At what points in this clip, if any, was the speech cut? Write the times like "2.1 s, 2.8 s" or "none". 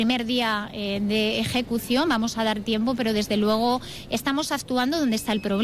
none